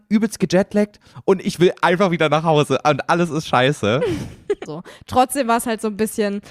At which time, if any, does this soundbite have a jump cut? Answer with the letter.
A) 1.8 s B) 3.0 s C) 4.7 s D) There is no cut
C